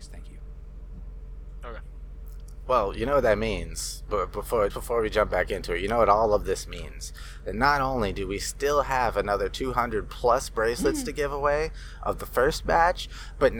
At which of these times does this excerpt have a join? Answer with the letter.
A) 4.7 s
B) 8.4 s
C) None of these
A